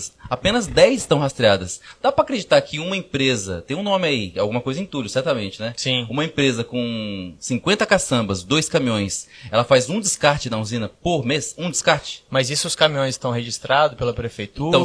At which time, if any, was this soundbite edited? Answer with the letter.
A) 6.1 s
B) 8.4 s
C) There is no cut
C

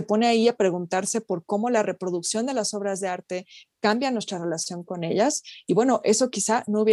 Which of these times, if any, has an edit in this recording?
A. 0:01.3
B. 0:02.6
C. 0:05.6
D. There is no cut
D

